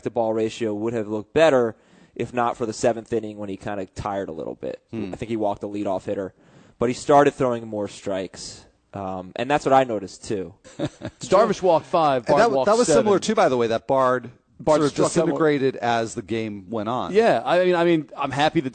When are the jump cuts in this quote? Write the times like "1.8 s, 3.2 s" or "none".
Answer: 10.6 s

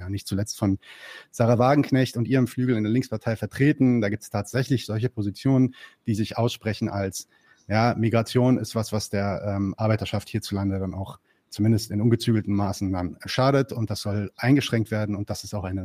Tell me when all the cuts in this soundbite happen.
none

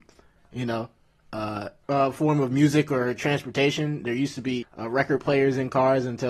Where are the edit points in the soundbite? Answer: 1.8 s, 4.6 s

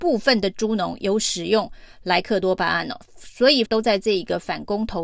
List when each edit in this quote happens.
3.7 s

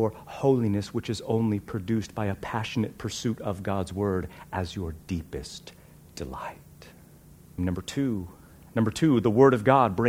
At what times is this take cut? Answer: 7.6 s

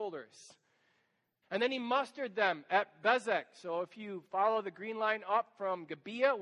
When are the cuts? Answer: 1.4 s

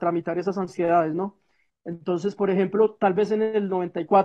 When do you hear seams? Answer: none

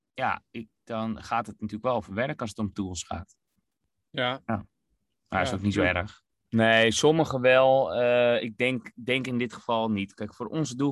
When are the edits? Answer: 6.3 s

